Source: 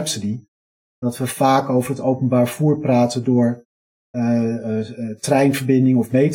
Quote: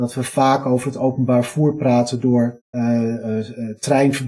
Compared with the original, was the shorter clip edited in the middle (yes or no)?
yes